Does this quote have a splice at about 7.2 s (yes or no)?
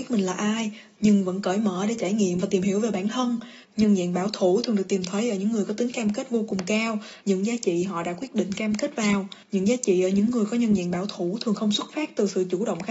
yes